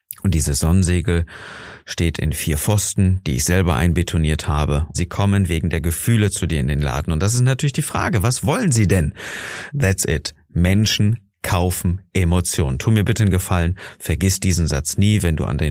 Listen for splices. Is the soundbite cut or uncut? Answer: cut